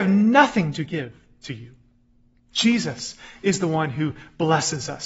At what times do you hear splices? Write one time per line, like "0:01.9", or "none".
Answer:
none